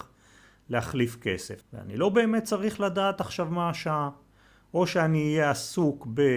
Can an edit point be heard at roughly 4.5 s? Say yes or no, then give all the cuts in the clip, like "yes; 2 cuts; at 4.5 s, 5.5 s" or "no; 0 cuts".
no; 1 cut; at 1.6 s